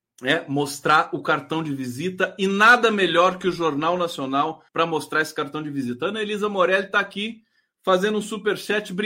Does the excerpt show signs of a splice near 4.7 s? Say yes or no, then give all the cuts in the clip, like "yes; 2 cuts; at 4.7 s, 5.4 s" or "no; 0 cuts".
yes; 1 cut; at 4.7 s